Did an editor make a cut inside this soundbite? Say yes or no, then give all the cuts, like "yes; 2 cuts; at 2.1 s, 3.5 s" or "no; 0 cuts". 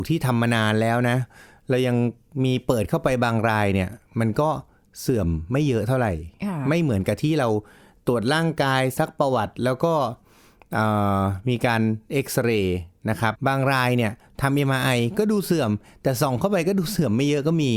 yes; 1 cut; at 13.3 s